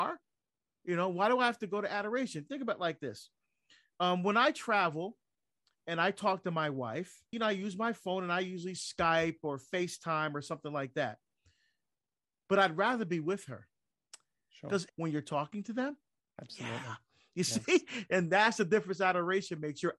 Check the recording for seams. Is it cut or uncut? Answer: cut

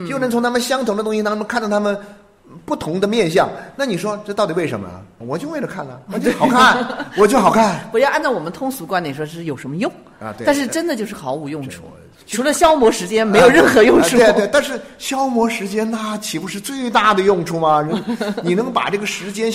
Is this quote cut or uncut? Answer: cut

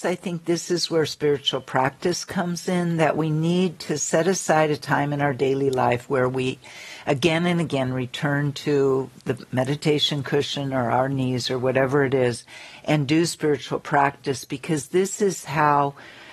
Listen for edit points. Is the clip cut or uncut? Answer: uncut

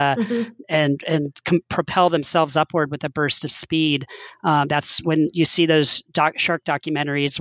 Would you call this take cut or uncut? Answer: uncut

